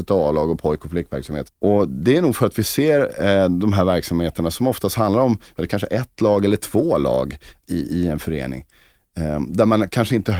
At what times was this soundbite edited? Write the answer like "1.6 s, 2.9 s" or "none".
1.5 s